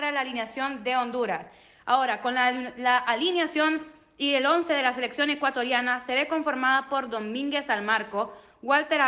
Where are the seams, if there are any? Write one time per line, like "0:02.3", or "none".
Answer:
none